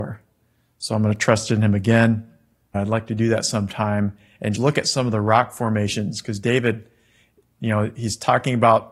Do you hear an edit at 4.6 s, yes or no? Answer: yes